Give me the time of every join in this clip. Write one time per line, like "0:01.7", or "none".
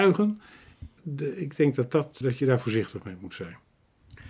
0:01.0
0:02.2